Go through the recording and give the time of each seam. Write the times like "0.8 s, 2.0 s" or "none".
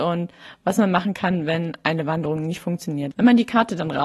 3.1 s